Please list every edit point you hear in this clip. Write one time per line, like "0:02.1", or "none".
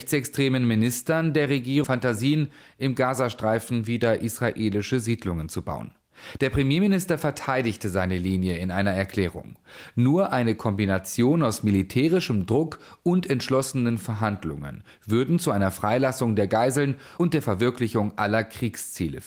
0:01.8